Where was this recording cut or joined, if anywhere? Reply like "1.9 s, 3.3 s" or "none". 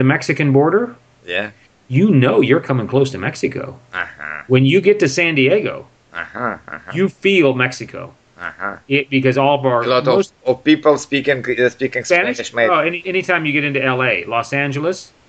13.0 s